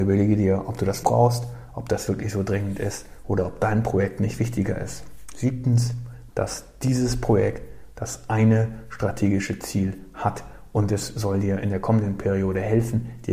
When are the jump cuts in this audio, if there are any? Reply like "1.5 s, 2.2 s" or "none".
1.0 s, 6.3 s